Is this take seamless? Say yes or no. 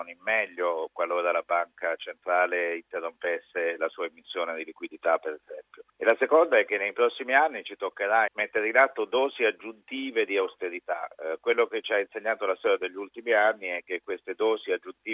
no